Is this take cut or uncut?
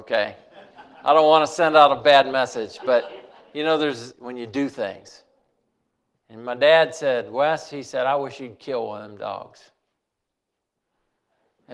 cut